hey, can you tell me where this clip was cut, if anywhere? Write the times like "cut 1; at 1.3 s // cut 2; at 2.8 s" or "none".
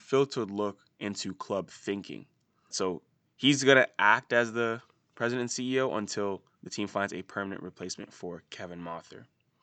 cut 1; at 2.7 s